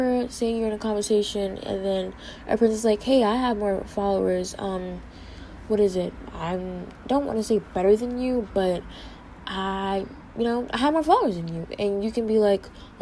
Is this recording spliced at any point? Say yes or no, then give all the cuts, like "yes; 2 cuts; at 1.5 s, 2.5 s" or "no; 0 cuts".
no; 0 cuts